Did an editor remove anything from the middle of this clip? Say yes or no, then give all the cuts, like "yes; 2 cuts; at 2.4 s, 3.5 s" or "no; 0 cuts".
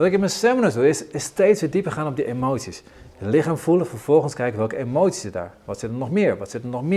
no; 0 cuts